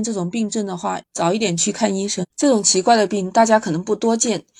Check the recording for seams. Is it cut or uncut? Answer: cut